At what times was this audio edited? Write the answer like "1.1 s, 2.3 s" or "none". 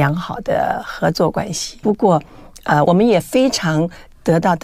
1.8 s, 2.8 s